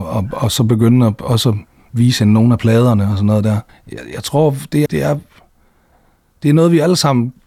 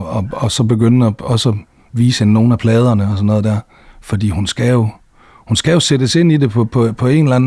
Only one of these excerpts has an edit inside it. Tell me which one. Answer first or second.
first